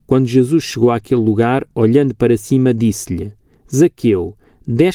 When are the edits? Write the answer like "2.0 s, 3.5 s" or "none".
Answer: none